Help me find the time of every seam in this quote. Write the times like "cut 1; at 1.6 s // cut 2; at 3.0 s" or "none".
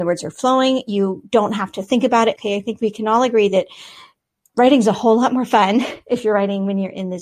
cut 1; at 2.3 s